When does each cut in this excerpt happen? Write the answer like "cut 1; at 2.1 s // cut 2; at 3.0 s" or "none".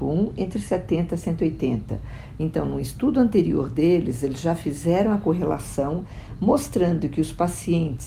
none